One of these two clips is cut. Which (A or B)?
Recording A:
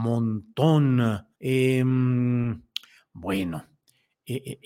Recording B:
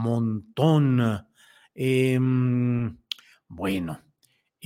A